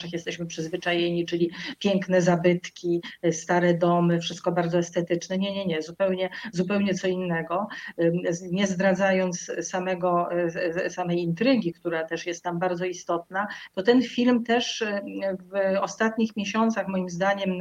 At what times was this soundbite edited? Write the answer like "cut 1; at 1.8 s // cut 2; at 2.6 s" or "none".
none